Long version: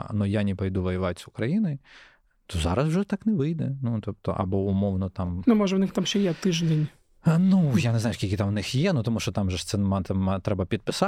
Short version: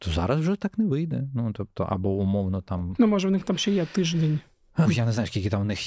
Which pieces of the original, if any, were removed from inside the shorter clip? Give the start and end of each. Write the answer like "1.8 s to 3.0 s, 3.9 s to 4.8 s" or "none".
7.3 s to 7.7 s